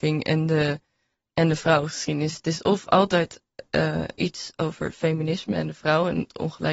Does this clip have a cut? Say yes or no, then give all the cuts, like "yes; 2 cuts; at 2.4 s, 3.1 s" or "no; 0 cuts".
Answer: no; 0 cuts